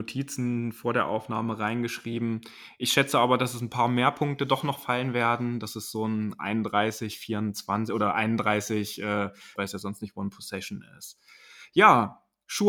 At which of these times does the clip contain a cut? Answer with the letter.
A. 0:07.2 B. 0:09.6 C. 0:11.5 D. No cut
B